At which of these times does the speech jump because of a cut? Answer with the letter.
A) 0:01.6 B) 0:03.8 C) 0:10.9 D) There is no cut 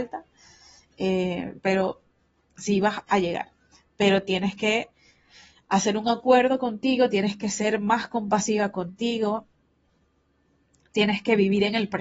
A